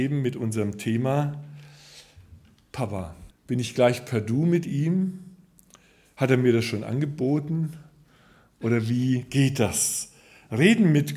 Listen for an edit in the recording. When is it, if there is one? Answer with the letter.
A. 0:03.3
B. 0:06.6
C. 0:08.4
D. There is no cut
A